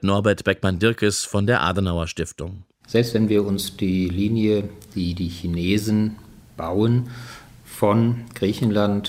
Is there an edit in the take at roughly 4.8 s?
no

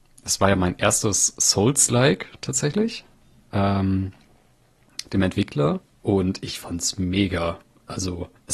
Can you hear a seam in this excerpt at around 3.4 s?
no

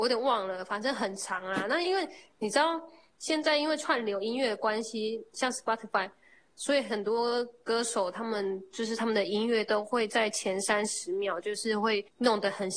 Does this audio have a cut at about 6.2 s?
no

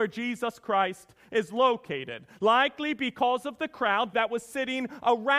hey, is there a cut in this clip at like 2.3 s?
no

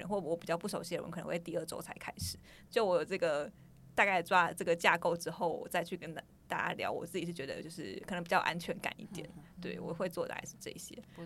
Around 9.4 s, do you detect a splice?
no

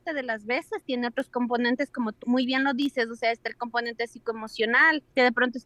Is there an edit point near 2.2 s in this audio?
yes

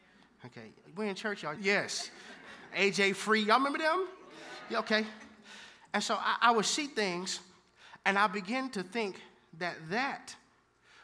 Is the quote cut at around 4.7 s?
no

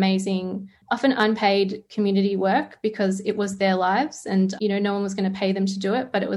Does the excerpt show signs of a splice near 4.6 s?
yes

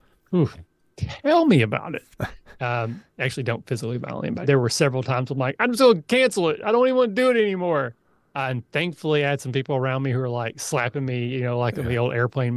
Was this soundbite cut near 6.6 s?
no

